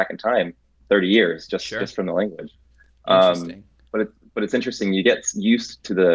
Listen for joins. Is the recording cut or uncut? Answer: uncut